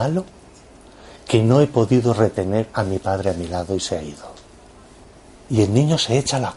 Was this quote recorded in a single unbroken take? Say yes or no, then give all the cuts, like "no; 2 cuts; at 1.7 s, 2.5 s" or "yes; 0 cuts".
no; 1 cut; at 5.5 s